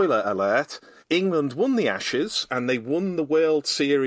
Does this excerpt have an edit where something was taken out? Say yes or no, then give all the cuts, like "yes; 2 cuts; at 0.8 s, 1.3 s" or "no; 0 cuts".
yes; 1 cut; at 2.5 s